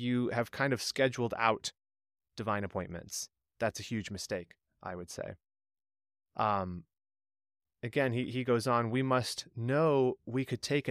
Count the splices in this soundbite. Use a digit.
0